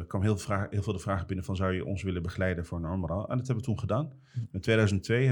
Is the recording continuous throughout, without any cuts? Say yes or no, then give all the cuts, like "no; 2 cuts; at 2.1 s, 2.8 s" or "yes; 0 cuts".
yes; 0 cuts